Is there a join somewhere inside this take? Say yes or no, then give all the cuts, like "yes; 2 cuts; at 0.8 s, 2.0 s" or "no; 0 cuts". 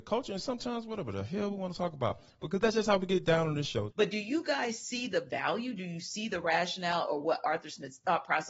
yes; 1 cut; at 3.9 s